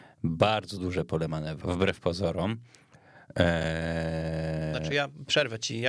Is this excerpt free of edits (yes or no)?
no